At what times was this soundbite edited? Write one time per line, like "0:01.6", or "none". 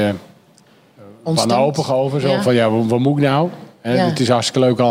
none

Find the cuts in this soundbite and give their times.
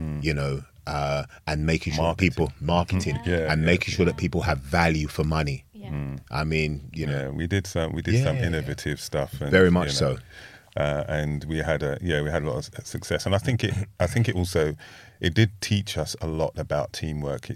none

